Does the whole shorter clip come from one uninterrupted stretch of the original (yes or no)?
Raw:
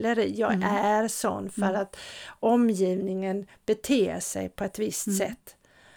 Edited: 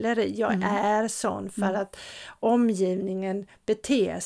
yes